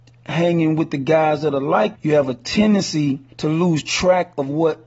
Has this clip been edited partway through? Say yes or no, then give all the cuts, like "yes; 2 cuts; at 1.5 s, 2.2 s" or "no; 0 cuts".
yes; 2 cuts; at 1.9 s, 3.3 s